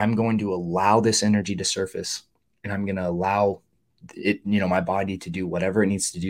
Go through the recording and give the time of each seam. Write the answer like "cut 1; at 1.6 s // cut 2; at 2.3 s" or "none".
none